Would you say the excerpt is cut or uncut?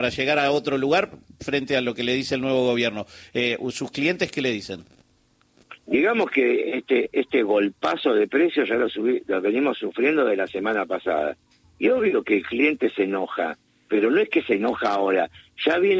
cut